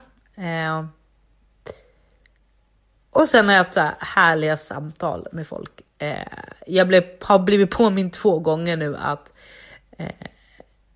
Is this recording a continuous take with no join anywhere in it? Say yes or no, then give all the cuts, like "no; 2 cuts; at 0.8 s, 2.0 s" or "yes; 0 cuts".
yes; 0 cuts